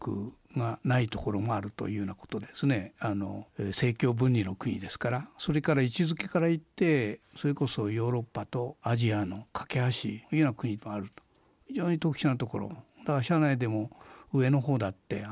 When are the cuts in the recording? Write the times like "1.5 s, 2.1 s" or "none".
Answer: 2.4 s